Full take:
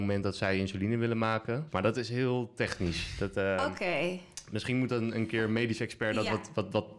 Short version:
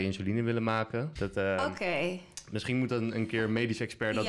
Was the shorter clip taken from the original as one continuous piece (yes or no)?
no